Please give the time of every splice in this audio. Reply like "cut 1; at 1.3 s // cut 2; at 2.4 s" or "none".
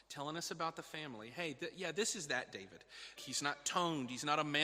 cut 1; at 3.2 s